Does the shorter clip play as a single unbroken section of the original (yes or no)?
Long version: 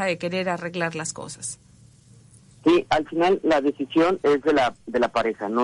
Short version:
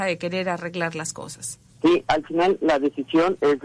no